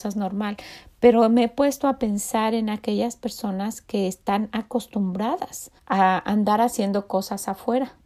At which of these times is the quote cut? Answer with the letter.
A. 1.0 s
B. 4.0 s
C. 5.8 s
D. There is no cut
C